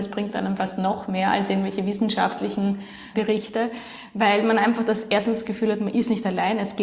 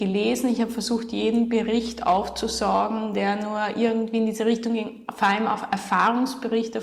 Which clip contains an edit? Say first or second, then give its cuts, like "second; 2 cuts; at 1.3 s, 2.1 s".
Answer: first; 1 cut; at 3.1 s